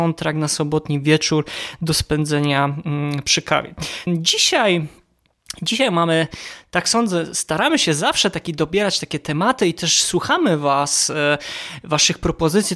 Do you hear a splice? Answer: yes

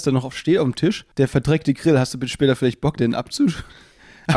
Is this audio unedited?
no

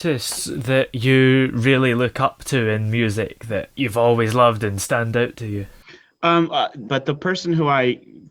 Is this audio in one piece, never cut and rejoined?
no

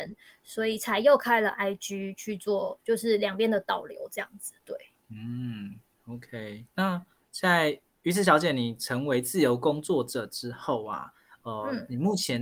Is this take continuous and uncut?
yes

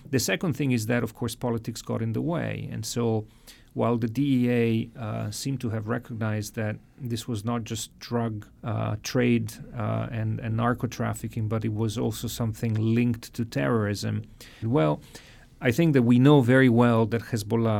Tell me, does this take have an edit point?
yes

